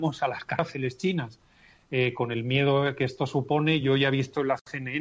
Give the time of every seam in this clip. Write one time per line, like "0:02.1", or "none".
none